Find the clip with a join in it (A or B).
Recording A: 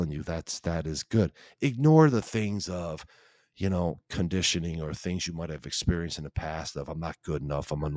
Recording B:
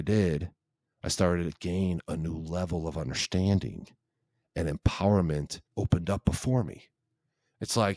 B